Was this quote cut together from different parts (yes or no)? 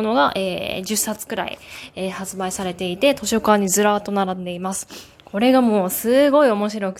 no